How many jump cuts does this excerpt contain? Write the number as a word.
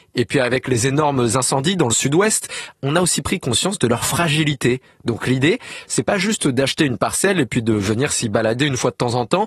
one